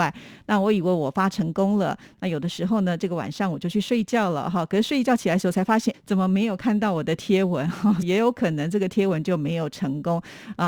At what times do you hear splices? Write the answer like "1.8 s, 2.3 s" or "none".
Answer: 5.9 s, 8.0 s